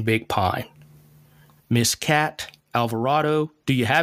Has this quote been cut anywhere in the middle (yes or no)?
yes